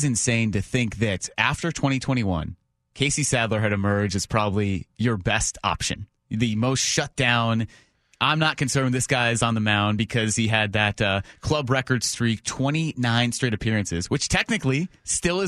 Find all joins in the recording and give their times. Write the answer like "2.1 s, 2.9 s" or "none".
none